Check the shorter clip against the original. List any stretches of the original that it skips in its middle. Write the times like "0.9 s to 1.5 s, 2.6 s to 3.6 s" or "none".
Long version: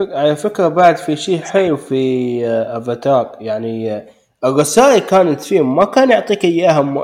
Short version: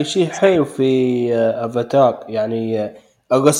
none